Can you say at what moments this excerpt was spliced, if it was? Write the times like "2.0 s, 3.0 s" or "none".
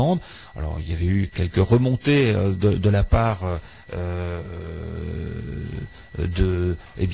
1.3 s